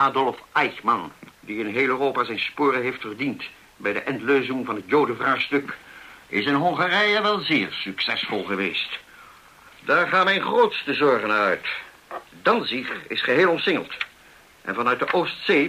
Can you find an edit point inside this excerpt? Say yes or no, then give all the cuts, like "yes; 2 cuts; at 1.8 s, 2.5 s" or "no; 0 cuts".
yes; 2 cuts; at 1.3 s, 9.7 s